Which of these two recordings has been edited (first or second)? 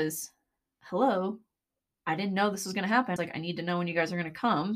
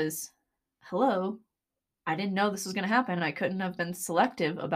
first